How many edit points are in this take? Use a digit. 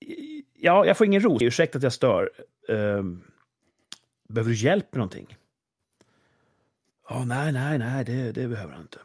1